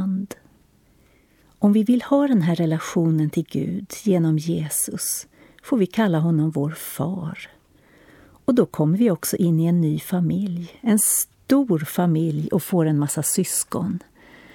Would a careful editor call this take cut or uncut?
uncut